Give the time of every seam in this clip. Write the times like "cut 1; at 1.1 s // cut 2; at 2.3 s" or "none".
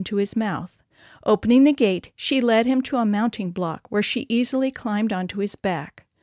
none